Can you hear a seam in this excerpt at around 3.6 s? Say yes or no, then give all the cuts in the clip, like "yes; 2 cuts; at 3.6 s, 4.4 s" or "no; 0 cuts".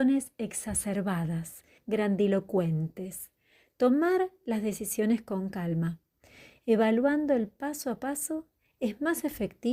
no; 1 cut; at 1.8 s